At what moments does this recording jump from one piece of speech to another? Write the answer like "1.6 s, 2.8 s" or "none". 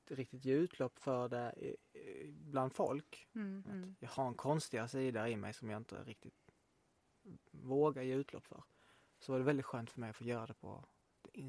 3.6 s